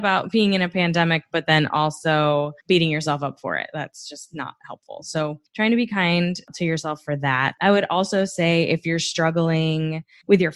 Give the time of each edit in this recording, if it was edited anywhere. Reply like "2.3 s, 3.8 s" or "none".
none